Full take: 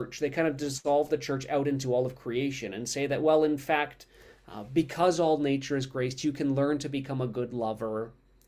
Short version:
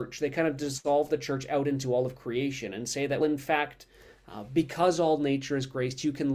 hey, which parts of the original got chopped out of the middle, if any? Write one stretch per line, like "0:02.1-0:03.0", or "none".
0:03.2-0:03.4